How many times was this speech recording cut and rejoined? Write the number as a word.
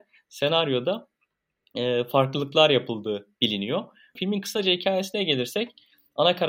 one